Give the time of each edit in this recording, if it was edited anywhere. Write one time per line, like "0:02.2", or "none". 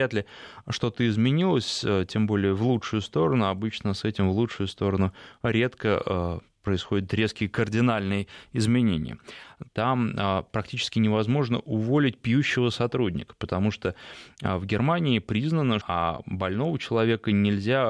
0:09.7
0:15.8